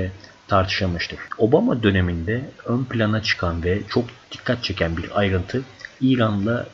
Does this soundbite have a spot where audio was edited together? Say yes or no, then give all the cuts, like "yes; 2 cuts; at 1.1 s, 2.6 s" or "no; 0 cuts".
yes; 2 cuts; at 1.3 s, 4.2 s